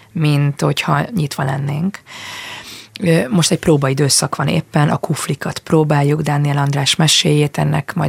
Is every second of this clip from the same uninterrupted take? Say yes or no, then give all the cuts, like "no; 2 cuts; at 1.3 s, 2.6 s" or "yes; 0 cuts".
yes; 0 cuts